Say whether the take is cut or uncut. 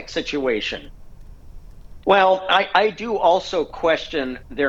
cut